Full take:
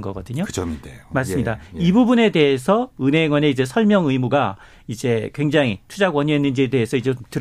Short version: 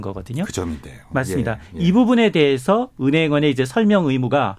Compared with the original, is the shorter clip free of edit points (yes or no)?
yes